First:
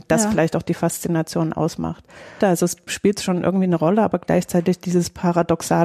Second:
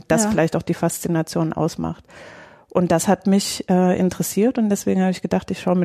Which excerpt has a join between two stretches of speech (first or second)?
first